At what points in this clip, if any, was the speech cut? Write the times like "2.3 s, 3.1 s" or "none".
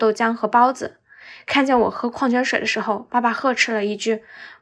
none